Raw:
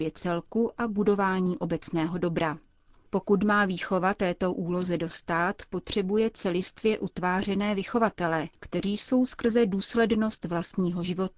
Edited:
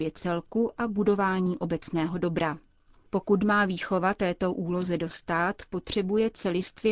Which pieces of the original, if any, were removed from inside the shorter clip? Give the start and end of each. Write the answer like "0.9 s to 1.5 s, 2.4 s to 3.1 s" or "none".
none

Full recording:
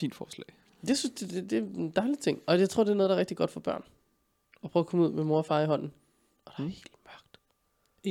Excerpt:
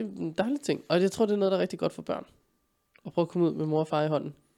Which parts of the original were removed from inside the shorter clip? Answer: none

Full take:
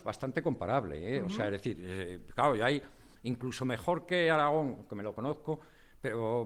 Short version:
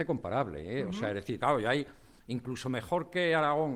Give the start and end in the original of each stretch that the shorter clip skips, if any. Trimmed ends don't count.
1.8 s to 2.4 s

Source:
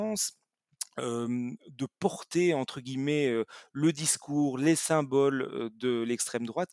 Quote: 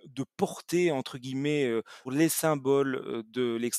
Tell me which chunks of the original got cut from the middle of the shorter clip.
3.7 s to 4.5 s

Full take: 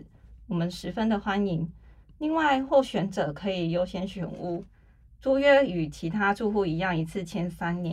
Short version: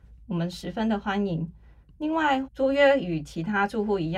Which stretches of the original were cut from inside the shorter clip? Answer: 2.6 s to 5.1 s

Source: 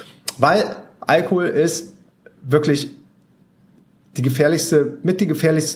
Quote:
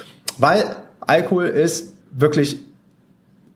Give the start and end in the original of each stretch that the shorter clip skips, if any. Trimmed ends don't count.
2.0 s to 2.3 s

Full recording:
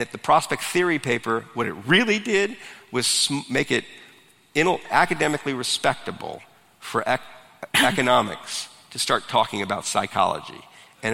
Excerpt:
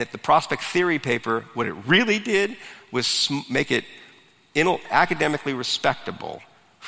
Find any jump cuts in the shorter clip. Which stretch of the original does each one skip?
none

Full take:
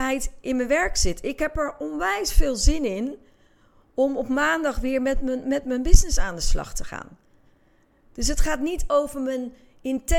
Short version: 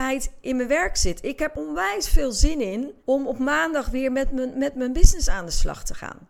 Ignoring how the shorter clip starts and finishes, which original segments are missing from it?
1.5 s to 1.8 s, 3.2 s to 3.9 s

